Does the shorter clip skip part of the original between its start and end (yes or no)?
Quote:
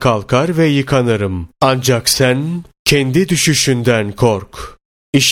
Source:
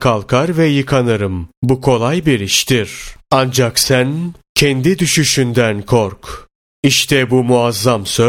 yes